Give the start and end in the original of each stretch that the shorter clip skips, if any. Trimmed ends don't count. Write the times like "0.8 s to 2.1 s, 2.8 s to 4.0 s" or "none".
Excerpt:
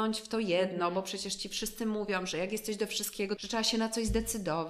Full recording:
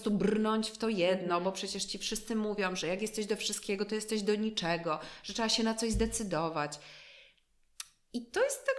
3.9 s to 5.2 s